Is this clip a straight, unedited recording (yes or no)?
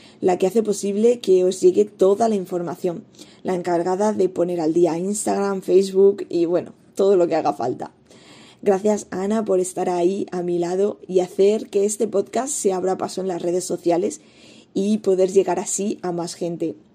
yes